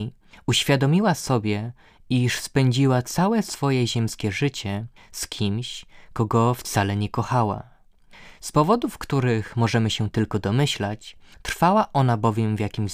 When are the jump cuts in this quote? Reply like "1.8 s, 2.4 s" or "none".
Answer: none

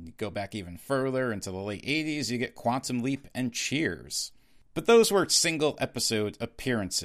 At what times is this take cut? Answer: none

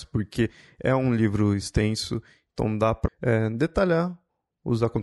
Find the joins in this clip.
3.1 s

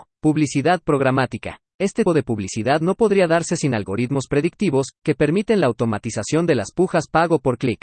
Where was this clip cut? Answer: 2.1 s

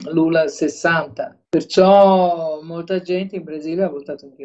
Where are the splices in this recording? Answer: 1.5 s

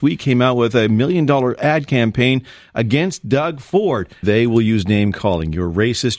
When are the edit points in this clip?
4.2 s

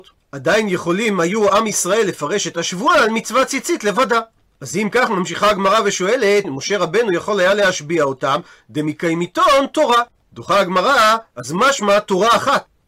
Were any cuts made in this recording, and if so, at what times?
6.4 s, 11.3 s

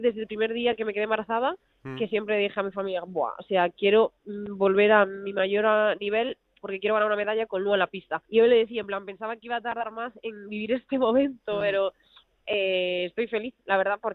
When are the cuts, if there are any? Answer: 8.2 s

